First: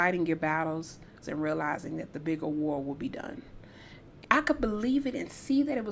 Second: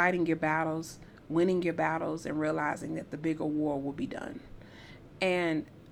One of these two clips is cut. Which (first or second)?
first